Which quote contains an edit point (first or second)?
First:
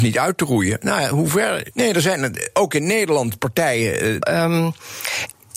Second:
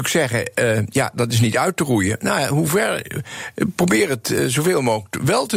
first